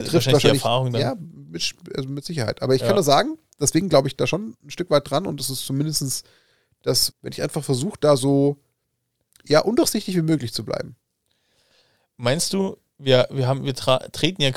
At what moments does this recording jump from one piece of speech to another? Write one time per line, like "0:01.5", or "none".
0:07.1

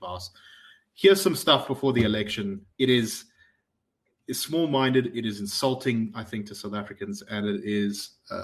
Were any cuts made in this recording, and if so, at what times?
0:02.7

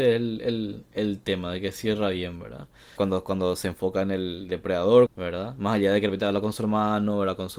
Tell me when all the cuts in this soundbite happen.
0:03.0
0:05.1

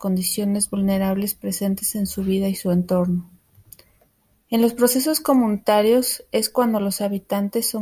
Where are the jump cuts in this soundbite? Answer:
0:04.4

